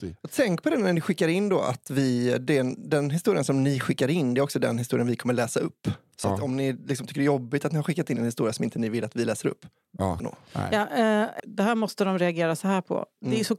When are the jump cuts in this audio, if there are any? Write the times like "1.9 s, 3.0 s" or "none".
10.2 s, 11.4 s

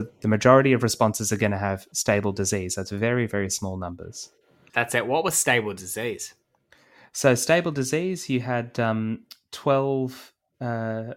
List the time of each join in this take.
4.7 s

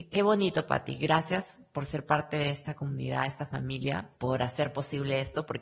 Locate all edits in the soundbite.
4.1 s

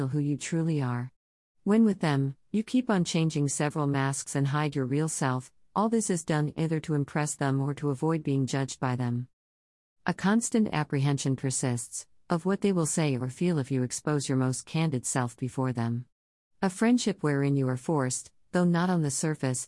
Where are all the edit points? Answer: none

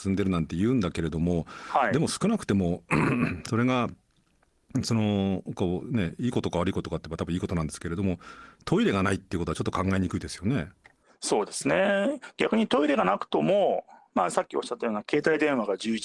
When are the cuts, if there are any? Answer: none

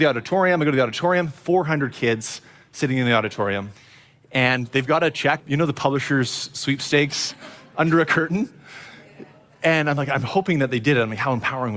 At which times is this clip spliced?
5.4 s

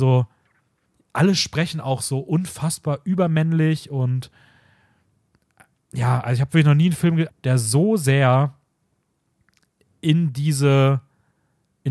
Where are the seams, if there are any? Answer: 7.3 s

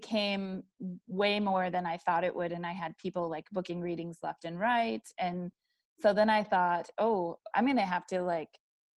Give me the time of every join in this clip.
7.5 s

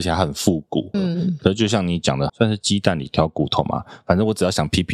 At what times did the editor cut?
0.9 s, 2.3 s

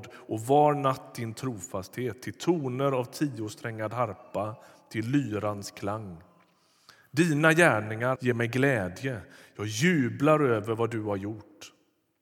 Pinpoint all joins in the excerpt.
8.1 s

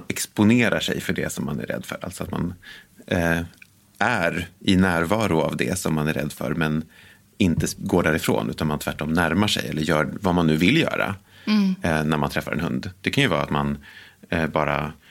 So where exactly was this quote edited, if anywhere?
none

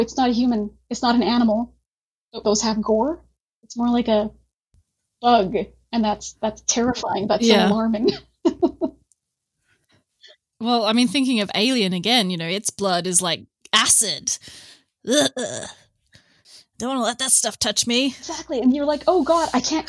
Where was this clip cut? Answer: 2.4 s

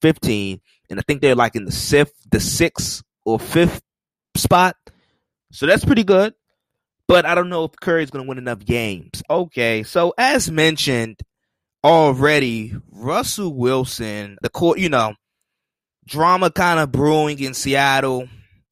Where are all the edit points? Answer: 9.3 s, 14.4 s

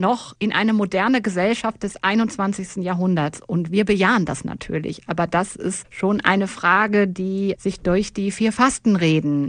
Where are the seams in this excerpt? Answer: none

